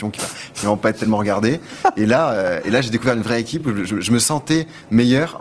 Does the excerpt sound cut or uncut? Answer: uncut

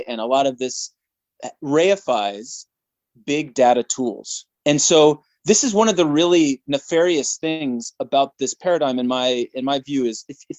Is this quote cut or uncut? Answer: cut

